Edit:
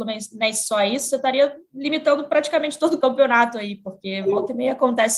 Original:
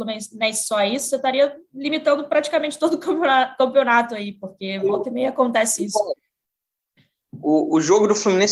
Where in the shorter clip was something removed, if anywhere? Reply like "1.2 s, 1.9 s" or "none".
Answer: 3.0 s